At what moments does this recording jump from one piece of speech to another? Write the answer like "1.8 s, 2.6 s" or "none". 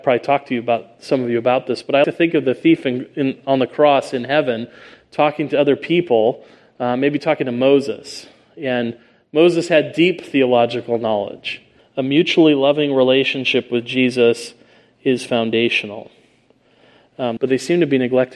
2.0 s, 11.8 s, 17.4 s